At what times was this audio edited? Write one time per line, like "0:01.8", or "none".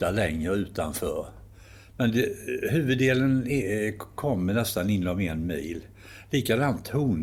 none

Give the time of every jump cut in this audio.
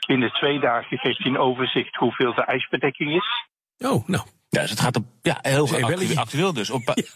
none

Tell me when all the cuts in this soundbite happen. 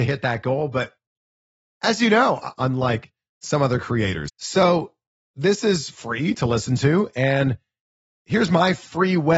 0:02.5
0:04.3

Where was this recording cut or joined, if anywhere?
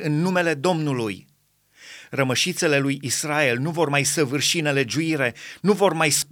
none

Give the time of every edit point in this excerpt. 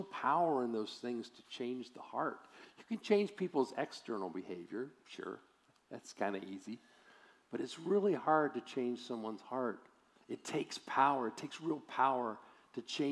none

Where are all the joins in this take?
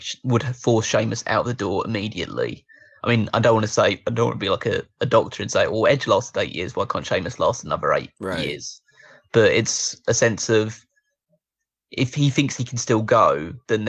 none

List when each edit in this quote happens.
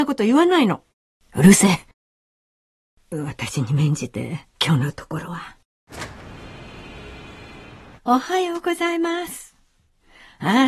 0:04.5
0:08.0

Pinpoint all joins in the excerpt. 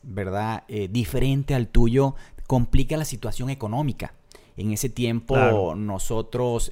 none

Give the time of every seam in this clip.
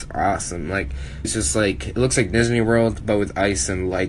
0:01.2

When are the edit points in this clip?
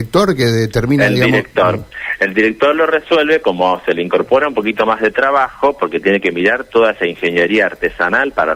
0:03.4

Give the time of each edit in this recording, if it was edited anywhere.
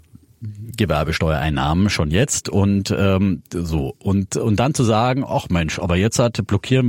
none

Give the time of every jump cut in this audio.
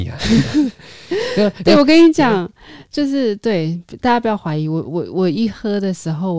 none

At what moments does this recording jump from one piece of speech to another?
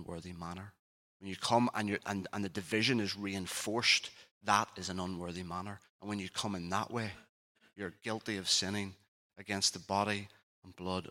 0:01.0

